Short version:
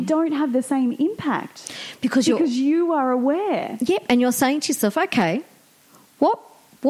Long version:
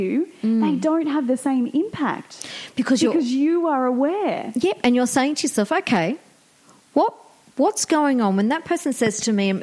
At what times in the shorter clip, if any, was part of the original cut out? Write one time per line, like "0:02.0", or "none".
none